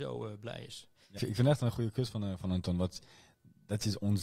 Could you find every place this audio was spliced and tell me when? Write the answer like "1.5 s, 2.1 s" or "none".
1.2 s